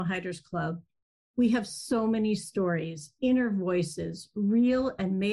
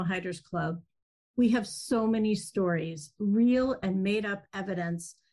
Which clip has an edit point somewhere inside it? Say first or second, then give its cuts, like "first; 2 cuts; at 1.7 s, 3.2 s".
second; 1 cut; at 3.2 s